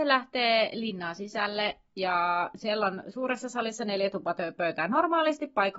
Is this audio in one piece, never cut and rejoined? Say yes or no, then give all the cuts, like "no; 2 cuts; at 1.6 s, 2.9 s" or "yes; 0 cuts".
yes; 0 cuts